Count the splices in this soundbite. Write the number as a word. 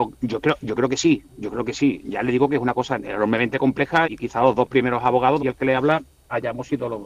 two